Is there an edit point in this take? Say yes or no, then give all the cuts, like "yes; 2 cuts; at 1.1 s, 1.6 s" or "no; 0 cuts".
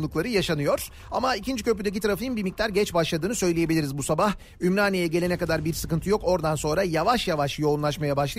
no; 0 cuts